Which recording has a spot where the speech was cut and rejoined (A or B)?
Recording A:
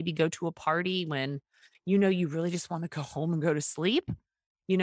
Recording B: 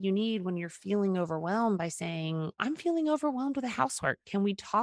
B